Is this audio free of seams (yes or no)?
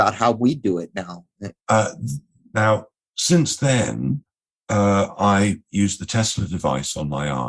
no